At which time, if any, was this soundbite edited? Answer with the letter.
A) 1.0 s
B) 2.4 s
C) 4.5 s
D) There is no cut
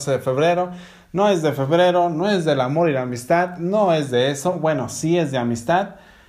D